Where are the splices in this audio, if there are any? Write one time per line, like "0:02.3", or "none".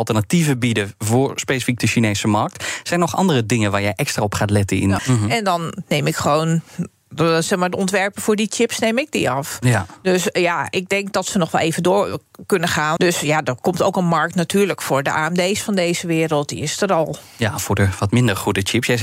0:05.0
0:13.0

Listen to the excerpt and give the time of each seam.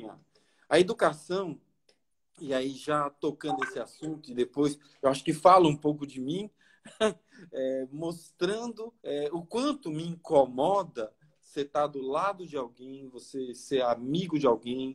0:09.0

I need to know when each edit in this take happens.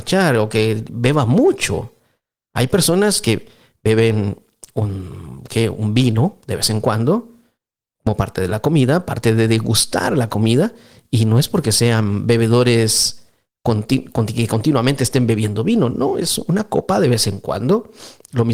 none

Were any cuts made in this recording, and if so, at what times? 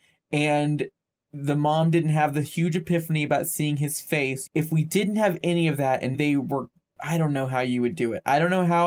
0:04.5
0:06.1

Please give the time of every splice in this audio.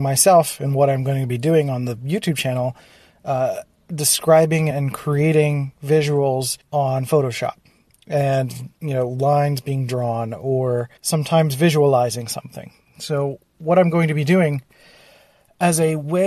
0:04.7
0:06.6
0:11.0

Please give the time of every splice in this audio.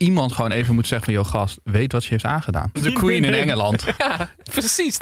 0:02.8
0:04.0

